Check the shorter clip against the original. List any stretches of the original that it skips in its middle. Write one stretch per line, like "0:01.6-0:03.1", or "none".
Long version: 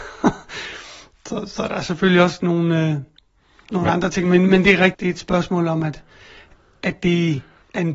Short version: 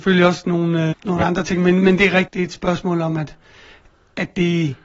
0:02.9-0:03.6